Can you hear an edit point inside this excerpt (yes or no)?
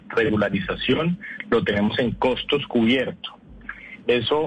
no